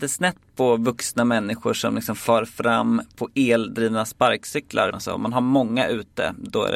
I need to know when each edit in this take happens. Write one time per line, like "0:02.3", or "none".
0:04.9